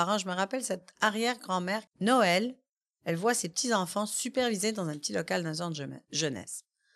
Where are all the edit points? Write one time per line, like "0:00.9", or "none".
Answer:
0:01.9